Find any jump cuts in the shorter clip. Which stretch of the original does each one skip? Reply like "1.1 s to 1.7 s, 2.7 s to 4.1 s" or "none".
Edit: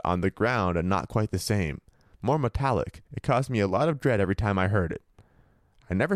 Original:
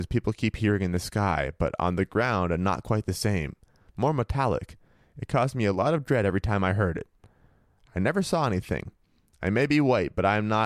4.8 s to 5.1 s